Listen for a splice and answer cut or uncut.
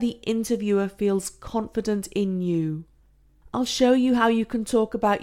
uncut